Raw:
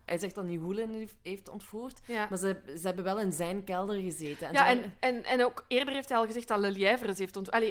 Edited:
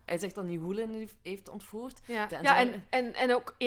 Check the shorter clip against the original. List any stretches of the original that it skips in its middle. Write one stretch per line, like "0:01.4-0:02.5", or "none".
0:02.3-0:04.4